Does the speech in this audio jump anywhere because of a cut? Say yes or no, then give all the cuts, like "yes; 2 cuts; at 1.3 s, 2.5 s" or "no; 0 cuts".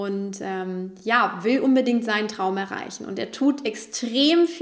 no; 0 cuts